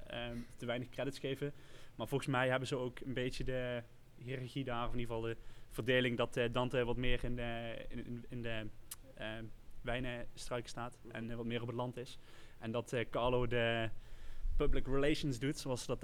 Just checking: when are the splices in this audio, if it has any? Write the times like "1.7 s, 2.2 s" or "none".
none